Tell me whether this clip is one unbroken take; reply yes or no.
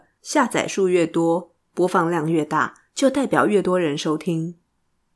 yes